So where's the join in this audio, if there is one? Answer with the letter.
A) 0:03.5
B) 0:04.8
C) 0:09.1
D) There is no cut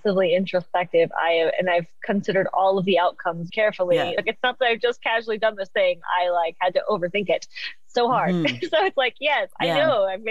A